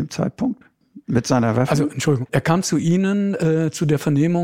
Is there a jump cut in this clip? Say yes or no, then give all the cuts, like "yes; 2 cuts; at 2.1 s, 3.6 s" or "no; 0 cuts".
yes; 1 cut; at 2.3 s